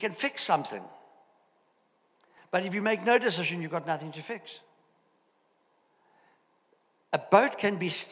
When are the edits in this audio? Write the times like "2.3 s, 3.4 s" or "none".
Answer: none